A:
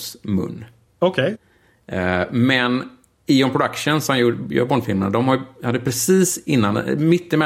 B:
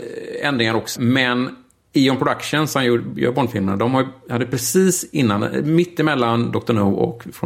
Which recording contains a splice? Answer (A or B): B